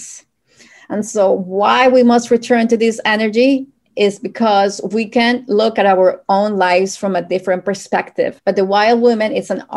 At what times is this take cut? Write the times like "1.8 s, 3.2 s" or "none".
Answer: 8.4 s